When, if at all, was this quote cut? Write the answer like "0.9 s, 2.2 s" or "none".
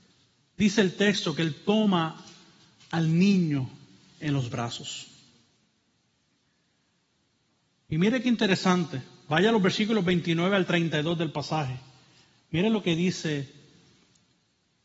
none